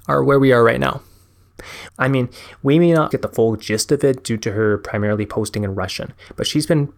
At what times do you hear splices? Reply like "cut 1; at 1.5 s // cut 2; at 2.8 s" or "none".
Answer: cut 1; at 1.9 s // cut 2; at 3.1 s